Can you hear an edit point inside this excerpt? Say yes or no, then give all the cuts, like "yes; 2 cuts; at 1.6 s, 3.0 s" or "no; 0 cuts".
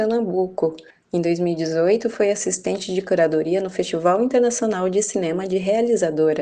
no; 0 cuts